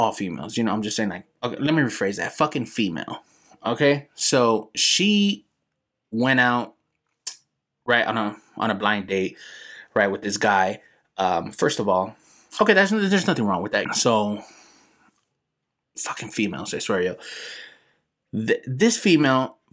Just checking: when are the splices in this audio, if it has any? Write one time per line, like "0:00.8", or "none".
0:13.8